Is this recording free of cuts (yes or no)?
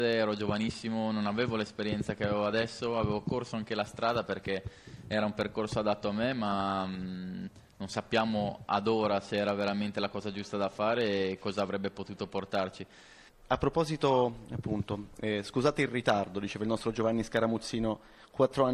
no